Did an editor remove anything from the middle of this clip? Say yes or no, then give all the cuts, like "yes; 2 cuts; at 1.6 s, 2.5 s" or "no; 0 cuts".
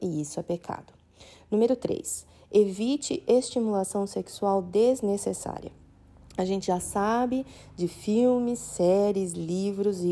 no; 0 cuts